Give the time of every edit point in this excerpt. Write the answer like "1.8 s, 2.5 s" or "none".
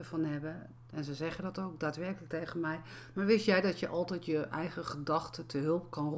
0.9 s, 3.1 s